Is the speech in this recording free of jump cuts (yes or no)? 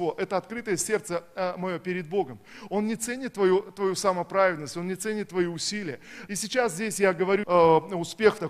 no